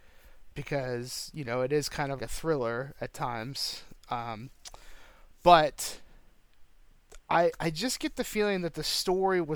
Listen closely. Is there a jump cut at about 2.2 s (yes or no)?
yes